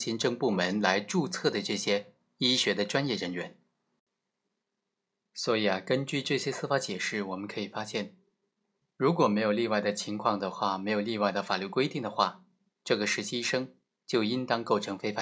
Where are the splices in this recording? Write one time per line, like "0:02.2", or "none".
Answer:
0:08.8